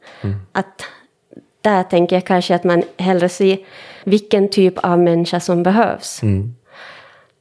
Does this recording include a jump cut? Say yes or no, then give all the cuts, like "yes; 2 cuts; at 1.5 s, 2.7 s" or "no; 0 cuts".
yes; 1 cut; at 4.0 s